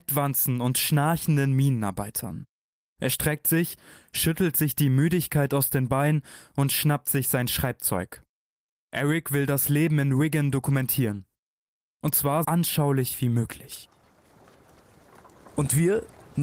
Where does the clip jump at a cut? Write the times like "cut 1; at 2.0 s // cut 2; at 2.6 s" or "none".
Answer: cut 1; at 12.4 s